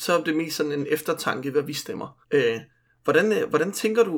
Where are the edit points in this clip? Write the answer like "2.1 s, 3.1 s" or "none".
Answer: 2.2 s